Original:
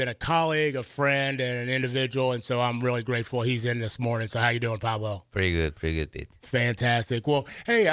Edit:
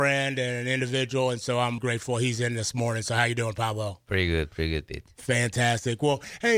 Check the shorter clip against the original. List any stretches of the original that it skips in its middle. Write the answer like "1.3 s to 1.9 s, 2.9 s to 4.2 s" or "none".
2.8 s to 3.0 s